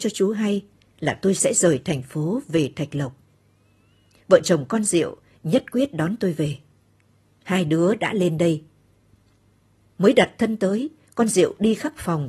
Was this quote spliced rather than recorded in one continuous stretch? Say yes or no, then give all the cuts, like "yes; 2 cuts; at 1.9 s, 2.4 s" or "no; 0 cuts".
no; 0 cuts